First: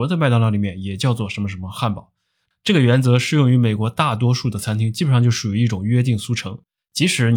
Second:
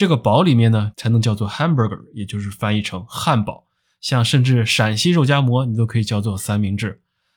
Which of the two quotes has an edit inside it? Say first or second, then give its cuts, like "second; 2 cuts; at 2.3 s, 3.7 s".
second; 2 cuts; at 0.9 s, 3.9 s